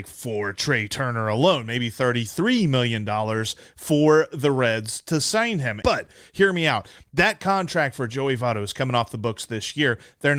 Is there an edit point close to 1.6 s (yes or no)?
no